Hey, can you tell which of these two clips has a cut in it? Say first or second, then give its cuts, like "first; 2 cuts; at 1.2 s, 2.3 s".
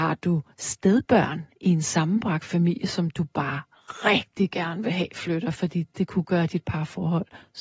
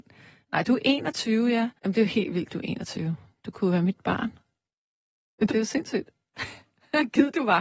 second; 2 cuts; at 1.8 s, 5.5 s